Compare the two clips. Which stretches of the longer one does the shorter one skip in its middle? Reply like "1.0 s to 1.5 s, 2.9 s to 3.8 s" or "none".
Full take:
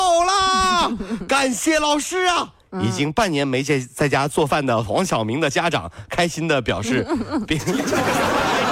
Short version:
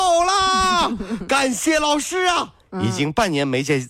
none